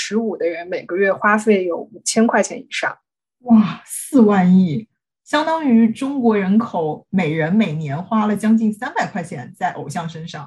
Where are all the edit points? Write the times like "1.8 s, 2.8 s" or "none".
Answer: 5.1 s